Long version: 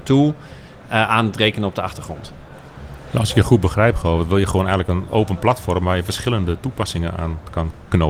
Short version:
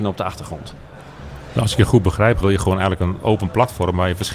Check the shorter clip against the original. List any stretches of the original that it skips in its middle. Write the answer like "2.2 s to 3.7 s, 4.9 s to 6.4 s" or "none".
4.0 s to 4.3 s